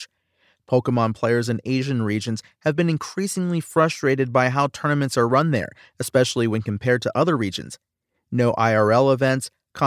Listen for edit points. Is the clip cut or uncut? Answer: uncut